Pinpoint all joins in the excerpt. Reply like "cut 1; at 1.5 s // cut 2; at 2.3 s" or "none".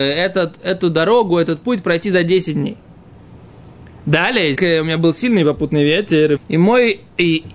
cut 1; at 4.6 s // cut 2; at 6.4 s